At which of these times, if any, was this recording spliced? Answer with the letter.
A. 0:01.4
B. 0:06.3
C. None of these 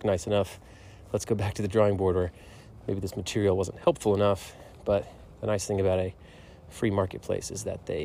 C